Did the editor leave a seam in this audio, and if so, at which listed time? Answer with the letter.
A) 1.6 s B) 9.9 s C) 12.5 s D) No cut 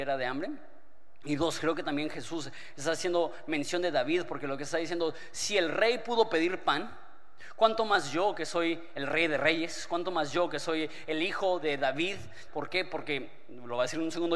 C